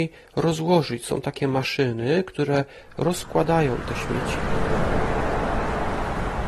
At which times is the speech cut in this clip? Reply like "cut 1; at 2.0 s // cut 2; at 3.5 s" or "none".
none